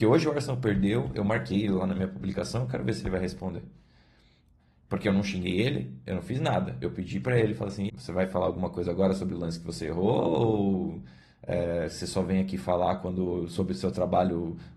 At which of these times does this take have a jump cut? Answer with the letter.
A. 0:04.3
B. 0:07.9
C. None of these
B